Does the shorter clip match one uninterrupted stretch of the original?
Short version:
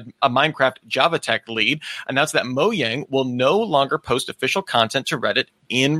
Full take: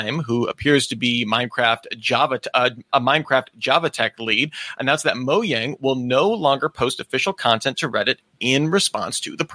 yes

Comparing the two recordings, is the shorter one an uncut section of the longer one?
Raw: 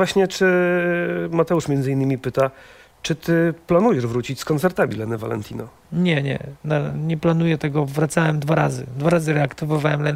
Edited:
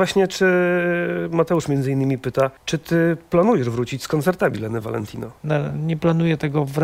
no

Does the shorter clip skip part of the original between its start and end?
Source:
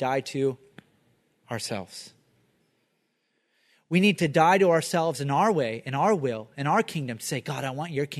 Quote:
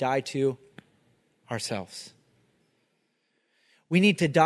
no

